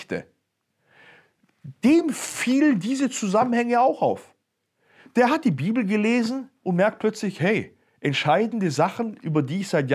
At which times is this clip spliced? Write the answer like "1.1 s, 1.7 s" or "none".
none

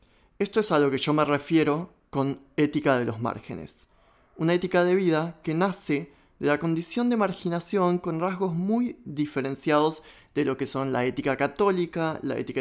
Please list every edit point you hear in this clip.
none

